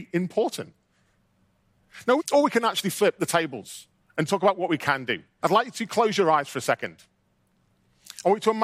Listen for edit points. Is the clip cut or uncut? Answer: cut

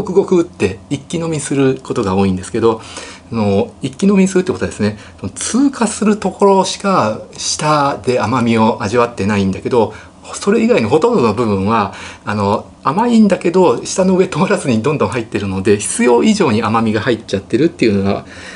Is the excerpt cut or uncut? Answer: cut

